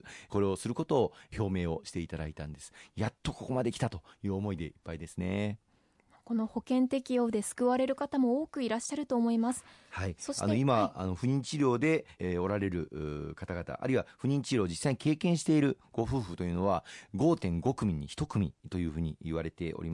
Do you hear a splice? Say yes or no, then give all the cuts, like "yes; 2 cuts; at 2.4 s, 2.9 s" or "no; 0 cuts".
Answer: yes; 1 cut; at 12.2 s